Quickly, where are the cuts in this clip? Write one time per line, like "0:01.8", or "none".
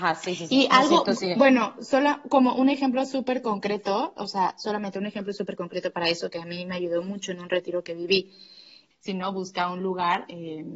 0:08.9